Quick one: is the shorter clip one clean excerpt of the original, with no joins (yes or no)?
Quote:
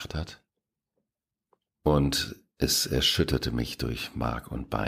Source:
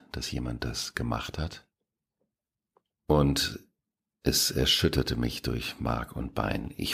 no